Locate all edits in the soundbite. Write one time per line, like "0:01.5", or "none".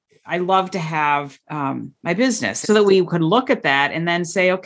0:01.4
0:02.6